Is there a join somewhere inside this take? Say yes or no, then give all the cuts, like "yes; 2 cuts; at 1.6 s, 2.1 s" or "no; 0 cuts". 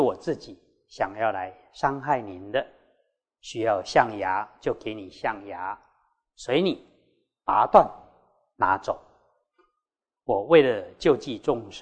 yes; 1 cut; at 3.3 s